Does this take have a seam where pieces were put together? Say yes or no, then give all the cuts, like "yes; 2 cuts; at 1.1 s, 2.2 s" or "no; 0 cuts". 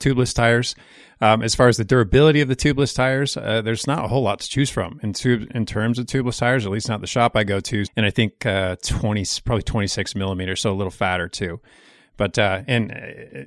yes; 1 cut; at 7.9 s